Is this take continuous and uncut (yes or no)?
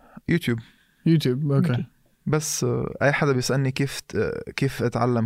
yes